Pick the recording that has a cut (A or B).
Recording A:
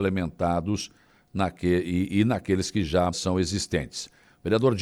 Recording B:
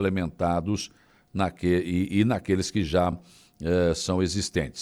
A